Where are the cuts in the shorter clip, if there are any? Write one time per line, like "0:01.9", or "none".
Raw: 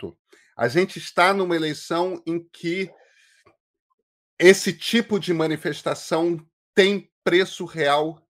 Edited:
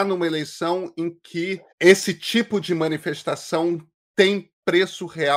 0:01.7